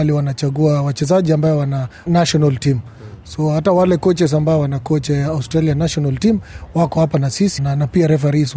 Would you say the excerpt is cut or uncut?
cut